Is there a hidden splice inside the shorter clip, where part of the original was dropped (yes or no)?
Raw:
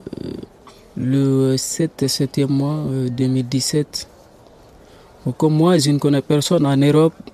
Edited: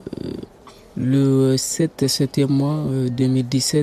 no